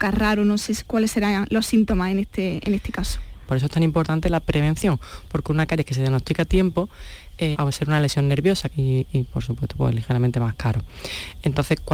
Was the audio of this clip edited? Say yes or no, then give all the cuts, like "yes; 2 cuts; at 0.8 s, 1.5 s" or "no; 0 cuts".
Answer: yes; 3 cuts; at 3.5 s, 7.5 s, 8.7 s